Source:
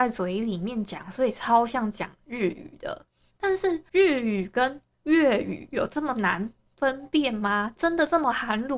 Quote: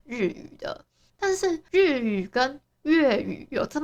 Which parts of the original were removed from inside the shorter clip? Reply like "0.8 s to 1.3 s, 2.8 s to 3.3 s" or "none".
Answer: none